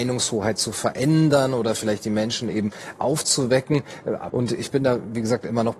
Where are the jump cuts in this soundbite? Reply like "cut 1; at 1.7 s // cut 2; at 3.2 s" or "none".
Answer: cut 1; at 4.3 s